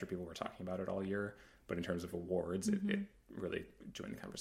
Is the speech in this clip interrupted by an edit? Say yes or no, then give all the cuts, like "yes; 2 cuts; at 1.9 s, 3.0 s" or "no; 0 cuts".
no; 0 cuts